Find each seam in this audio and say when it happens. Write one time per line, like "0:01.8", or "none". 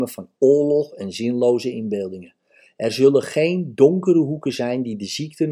none